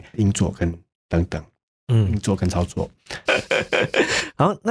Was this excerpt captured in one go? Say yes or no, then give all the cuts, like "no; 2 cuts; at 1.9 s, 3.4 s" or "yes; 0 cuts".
no; 1 cut; at 3.3 s